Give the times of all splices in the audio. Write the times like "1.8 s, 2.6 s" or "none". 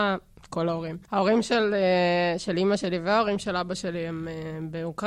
1.0 s